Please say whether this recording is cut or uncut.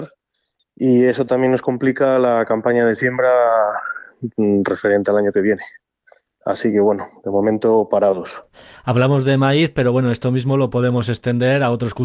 uncut